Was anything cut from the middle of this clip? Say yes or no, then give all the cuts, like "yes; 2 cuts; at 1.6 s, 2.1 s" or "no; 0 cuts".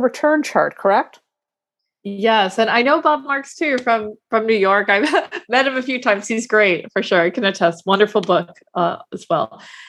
no; 0 cuts